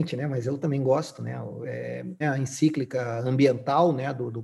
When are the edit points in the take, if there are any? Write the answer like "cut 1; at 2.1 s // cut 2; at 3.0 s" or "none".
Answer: cut 1; at 2.2 s